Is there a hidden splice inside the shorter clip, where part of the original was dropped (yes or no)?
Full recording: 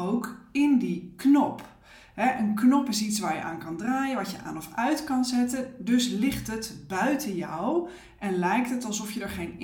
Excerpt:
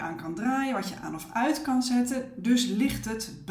no